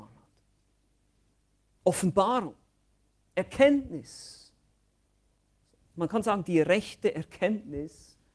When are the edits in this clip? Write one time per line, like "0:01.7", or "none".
0:01.6